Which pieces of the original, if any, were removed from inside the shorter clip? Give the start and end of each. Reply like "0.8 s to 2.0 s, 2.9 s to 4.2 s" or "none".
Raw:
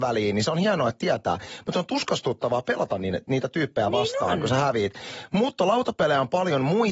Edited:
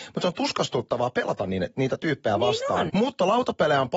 4.4 s to 5.3 s